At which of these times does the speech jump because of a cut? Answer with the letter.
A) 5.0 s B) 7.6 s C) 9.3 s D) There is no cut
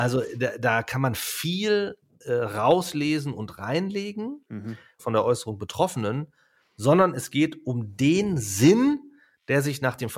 A